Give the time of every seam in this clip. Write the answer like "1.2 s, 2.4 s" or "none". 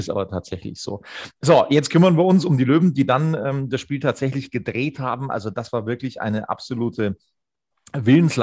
none